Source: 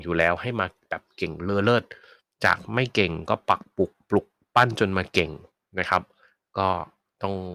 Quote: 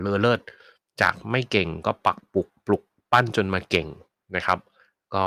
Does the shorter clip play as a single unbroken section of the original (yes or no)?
yes